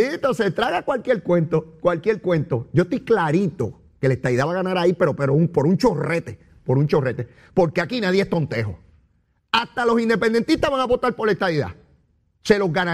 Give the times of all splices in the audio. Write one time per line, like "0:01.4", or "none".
none